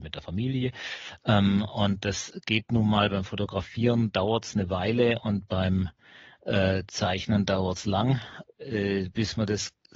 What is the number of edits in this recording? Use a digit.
2